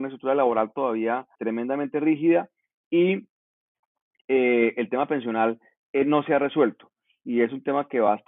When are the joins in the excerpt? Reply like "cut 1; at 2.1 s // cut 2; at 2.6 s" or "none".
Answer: cut 1; at 1.4 s